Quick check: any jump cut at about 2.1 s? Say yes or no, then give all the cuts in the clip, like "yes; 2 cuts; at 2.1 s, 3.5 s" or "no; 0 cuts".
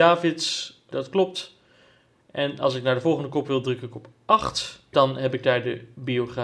no; 2 cuts; at 0.9 s, 4.9 s